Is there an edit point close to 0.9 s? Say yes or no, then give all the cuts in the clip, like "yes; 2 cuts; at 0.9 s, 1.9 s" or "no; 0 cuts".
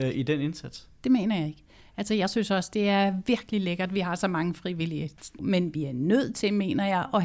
no; 1 cut; at 5.4 s